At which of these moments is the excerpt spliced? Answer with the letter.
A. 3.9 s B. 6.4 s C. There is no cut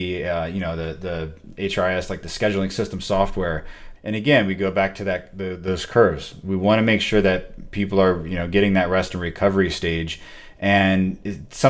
A